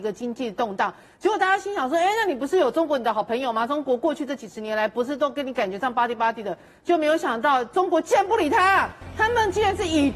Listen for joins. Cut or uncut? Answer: uncut